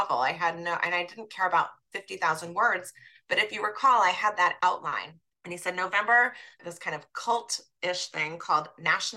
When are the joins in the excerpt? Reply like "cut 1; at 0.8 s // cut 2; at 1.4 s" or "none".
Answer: cut 1; at 5.3 s // cut 2; at 6.6 s